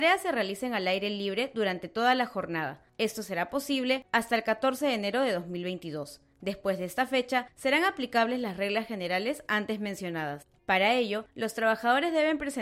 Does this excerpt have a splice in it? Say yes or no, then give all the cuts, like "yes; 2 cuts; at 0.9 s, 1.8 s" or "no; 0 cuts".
yes; 1 cut; at 10.6 s